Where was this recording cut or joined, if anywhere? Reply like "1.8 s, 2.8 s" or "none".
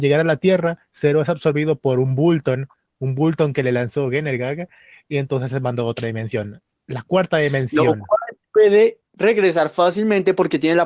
none